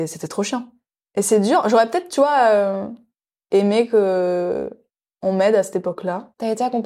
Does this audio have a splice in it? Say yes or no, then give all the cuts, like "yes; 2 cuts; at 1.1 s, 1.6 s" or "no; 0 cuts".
no; 0 cuts